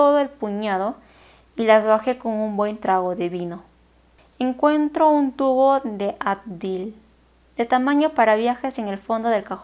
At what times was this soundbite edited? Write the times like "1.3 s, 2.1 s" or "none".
4.2 s